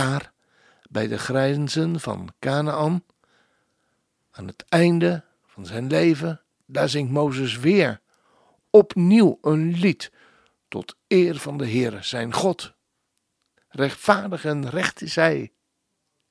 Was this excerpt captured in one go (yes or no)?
no